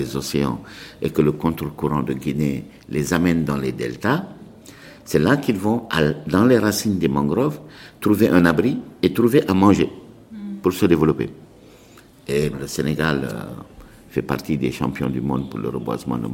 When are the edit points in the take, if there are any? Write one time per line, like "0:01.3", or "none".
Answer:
0:12.5